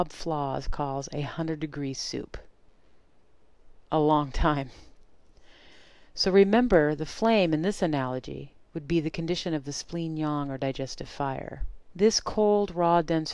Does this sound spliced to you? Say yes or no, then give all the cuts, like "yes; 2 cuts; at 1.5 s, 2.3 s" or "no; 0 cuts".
no; 0 cuts